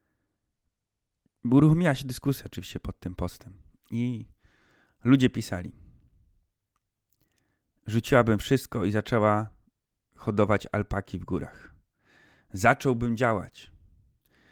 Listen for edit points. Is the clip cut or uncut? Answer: uncut